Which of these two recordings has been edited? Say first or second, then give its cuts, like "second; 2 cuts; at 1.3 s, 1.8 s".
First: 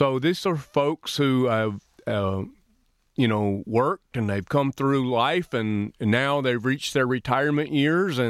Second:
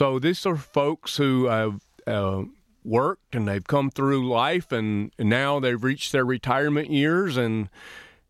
second; 1 cut; at 2.8 s